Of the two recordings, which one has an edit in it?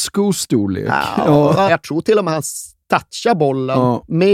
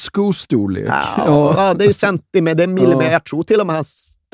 first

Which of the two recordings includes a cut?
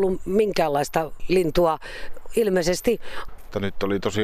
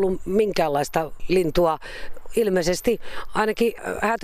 first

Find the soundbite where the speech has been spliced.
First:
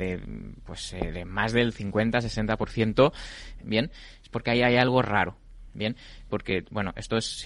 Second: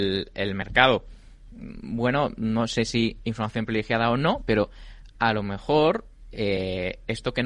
first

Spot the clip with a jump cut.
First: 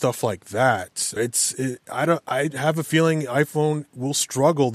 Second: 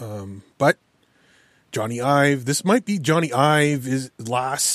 first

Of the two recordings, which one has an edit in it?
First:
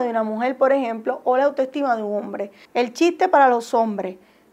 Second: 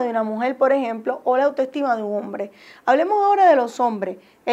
first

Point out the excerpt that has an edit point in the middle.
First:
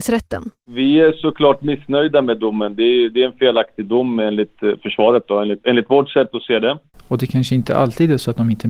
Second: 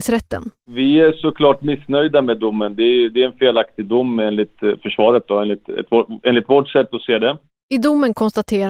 first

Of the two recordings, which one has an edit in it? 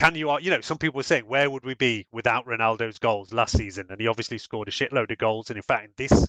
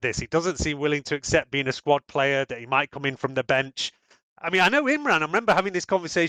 second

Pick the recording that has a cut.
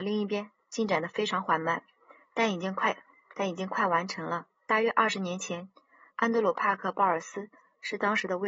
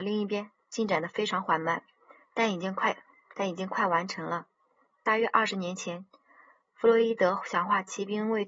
first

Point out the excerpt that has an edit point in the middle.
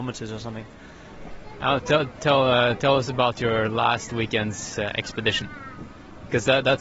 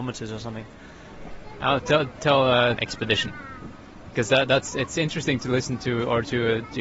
second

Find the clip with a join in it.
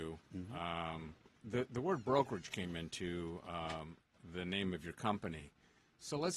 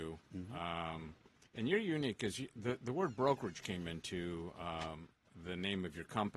first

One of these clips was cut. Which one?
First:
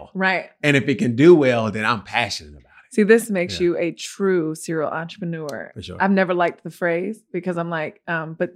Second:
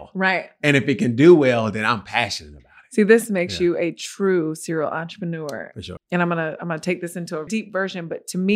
second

